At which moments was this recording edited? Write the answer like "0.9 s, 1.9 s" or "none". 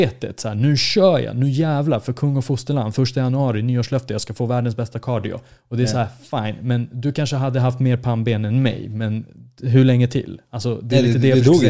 none